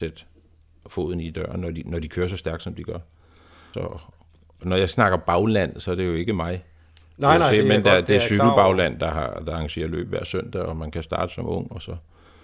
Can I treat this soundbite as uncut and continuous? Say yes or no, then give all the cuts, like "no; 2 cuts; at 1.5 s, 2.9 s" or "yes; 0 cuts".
no; 1 cut; at 3.7 s